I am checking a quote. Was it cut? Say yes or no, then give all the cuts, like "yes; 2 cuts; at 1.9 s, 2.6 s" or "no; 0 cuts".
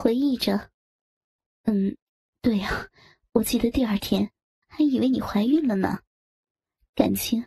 yes; 1 cut; at 4.6 s